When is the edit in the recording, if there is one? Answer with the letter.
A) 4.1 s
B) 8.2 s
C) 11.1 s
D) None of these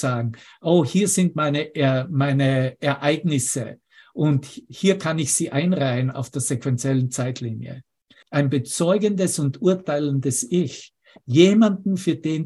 B